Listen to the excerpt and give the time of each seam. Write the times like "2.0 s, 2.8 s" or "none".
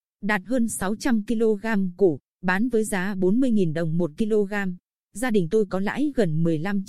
none